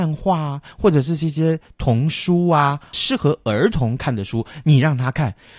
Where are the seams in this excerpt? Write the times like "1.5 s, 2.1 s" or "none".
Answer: none